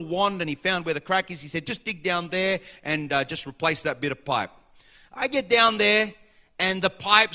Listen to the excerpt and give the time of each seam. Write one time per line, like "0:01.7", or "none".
none

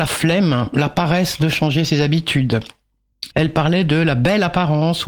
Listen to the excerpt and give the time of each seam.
0:03.3

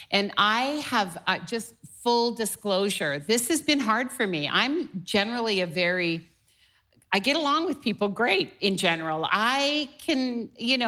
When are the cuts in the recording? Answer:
0:09.3

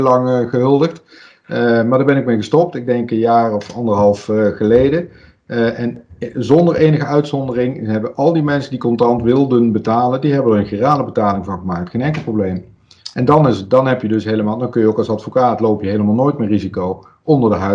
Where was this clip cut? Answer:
none

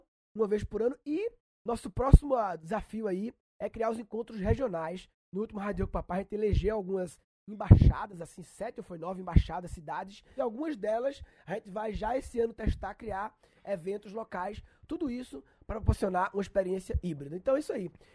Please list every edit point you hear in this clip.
none

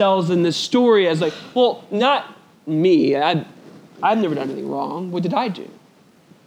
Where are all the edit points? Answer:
none

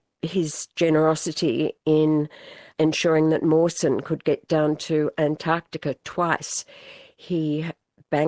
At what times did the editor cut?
none

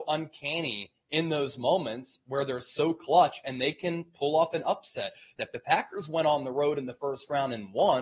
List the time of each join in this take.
0:05.4

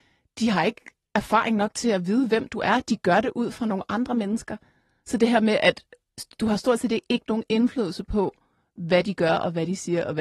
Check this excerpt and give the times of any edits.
none

